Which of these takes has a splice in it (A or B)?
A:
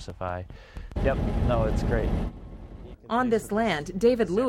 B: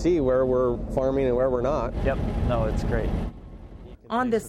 A